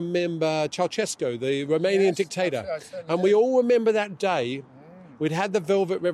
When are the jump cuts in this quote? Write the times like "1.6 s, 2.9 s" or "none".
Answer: none

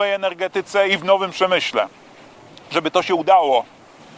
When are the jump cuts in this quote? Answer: none

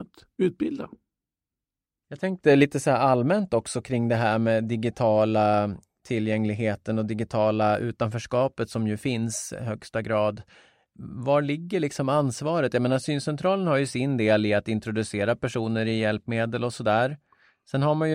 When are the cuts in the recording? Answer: none

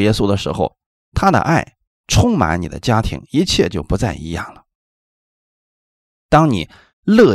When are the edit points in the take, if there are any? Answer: none

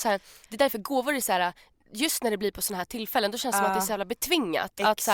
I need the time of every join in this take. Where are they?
none

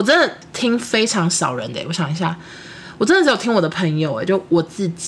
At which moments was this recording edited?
none

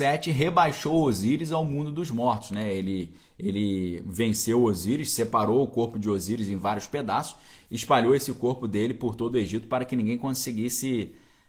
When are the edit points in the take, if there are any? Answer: none

